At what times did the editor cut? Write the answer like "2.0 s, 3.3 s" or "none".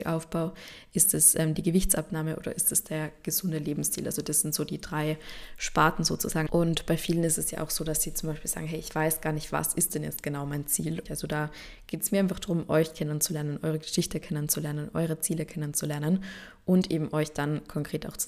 6.5 s, 11.1 s